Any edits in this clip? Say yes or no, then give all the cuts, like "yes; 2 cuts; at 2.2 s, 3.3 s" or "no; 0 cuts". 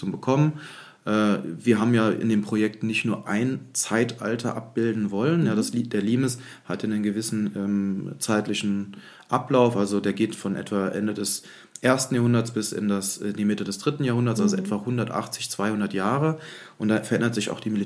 no; 0 cuts